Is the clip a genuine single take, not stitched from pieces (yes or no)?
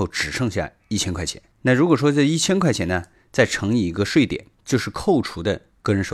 yes